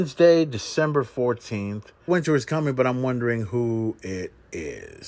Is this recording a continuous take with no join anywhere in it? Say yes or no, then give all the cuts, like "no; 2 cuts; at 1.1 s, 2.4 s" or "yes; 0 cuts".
no; 1 cut; at 2.1 s